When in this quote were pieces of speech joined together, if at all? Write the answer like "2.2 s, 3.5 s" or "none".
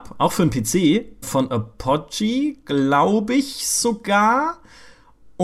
1.2 s